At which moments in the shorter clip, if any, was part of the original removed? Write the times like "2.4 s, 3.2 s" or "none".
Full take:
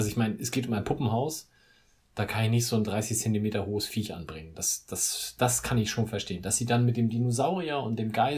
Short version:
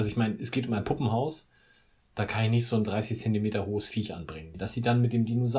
4.5 s